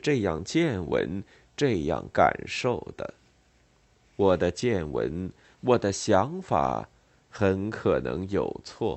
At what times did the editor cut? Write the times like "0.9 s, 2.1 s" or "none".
5.4 s